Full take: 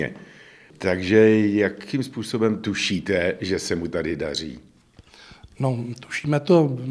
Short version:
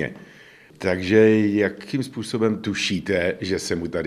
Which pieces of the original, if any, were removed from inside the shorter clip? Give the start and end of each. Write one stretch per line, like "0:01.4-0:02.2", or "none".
none